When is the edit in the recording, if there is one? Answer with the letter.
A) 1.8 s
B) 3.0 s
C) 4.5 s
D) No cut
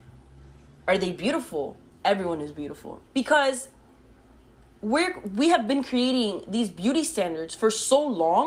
B